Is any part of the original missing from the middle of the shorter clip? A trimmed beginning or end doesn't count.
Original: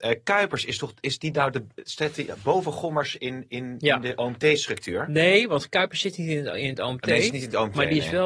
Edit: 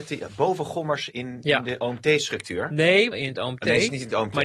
yes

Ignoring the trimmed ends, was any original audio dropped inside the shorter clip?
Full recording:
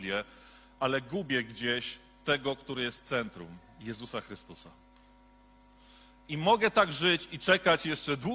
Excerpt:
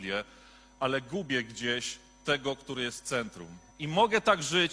yes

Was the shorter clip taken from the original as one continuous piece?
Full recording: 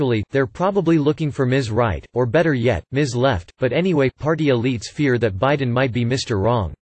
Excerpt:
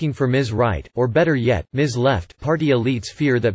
no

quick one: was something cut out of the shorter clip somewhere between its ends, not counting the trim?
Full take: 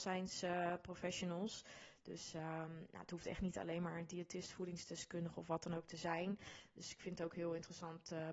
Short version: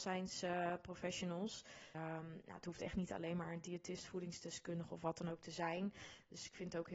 yes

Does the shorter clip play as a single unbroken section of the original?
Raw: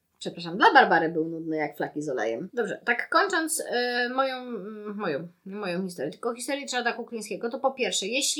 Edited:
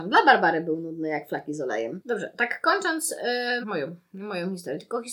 no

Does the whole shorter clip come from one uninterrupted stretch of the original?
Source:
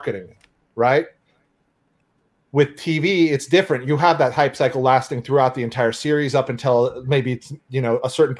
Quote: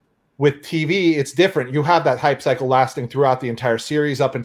yes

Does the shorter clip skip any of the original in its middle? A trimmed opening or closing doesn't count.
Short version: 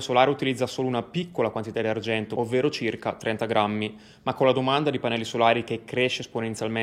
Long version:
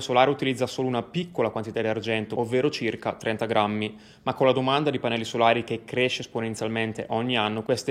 no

